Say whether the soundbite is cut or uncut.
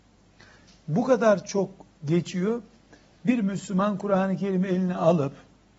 uncut